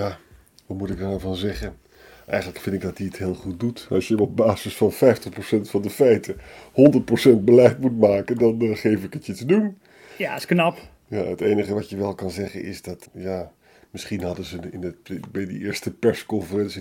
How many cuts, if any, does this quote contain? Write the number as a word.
one